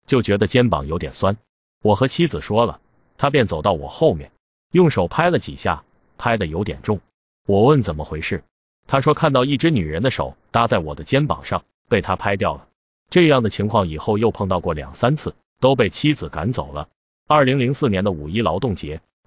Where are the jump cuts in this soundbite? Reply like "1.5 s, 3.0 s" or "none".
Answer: 12.9 s